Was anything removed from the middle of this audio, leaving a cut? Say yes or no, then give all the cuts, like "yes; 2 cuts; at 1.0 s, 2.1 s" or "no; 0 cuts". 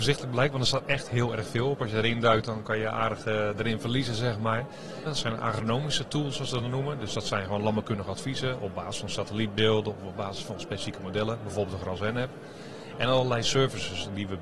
yes; 1 cut; at 5.1 s